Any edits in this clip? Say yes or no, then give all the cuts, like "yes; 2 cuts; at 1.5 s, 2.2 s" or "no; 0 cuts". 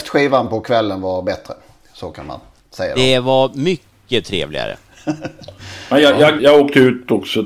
yes; 1 cut; at 6.4 s